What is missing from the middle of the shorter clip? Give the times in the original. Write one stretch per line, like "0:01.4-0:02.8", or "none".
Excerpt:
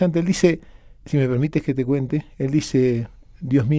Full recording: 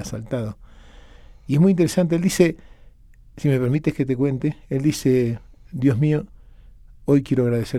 0:02.9-0:03.3